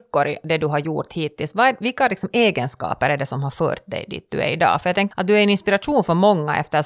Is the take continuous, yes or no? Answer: no